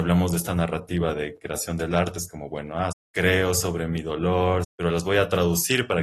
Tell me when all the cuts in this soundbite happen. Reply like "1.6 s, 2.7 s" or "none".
2.9 s, 4.6 s